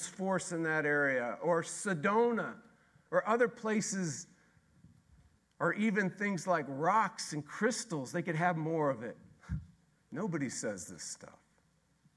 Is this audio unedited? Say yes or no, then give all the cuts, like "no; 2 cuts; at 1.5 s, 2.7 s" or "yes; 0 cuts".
no; 1 cut; at 10.0 s